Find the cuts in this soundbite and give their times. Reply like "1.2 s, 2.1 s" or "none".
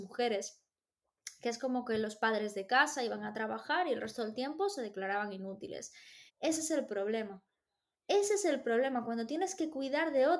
6.3 s